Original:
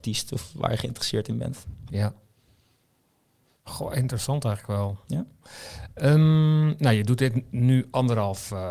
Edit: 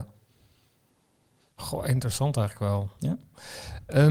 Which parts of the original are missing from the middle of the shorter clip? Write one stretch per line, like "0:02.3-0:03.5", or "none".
none